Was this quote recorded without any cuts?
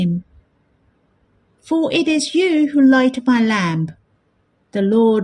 no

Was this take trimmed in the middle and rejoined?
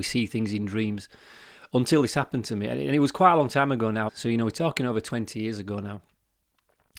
yes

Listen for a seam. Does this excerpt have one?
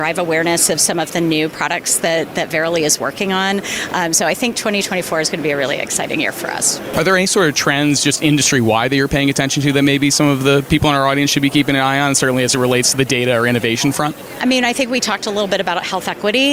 no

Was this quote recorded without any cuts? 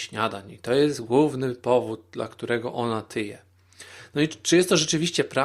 yes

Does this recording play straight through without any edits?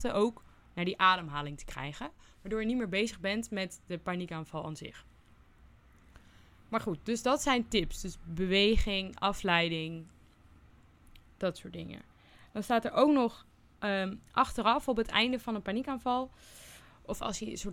yes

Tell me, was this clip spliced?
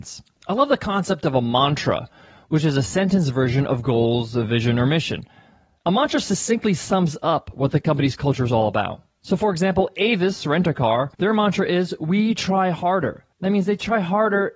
yes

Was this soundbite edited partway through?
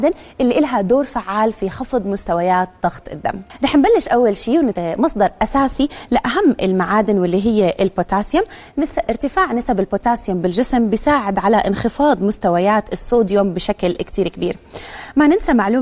yes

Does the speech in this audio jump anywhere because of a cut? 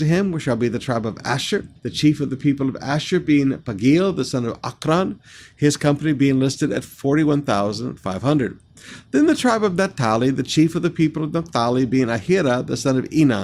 yes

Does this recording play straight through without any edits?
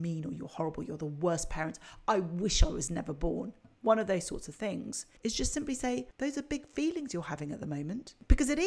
no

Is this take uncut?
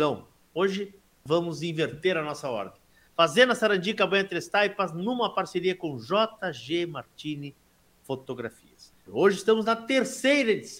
no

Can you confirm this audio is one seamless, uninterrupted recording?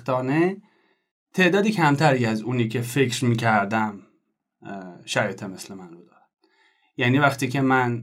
yes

